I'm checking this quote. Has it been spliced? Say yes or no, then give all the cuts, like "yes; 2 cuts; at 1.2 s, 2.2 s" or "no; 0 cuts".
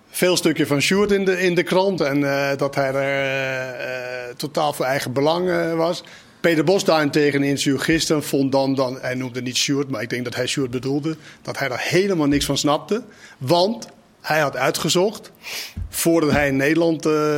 yes; 1 cut; at 2.0 s